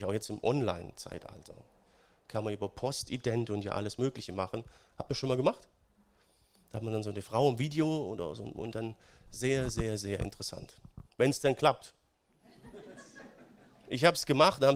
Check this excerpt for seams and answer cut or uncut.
cut